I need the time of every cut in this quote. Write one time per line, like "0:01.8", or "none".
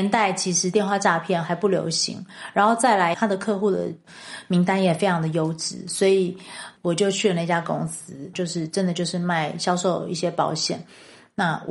0:03.1
0:08.3